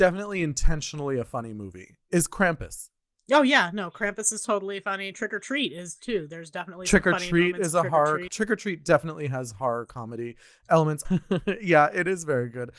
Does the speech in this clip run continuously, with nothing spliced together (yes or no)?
no